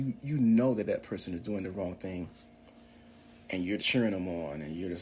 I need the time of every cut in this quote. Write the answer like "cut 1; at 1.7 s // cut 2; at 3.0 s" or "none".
cut 1; at 3.8 s